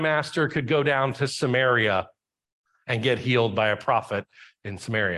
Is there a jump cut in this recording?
no; 0 cuts

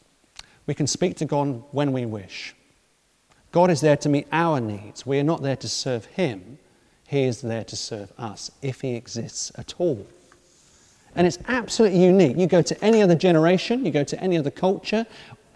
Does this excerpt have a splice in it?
no; 0 cuts

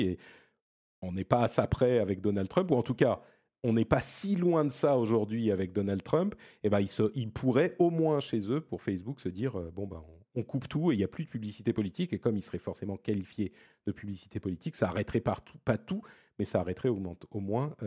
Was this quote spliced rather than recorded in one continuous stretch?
no; 0 cuts

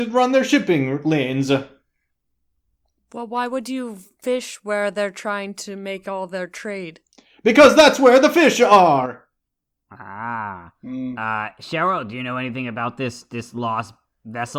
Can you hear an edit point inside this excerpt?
no; 0 cuts

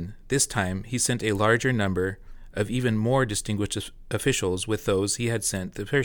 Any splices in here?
no; 0 cuts

